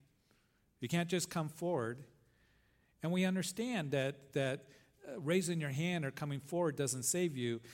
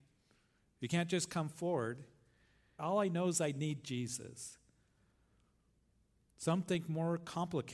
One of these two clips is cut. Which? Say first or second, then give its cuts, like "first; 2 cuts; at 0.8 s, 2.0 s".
second; 1 cut; at 2.8 s